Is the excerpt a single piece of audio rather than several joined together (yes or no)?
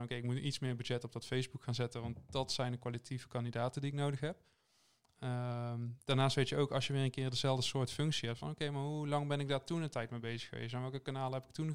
yes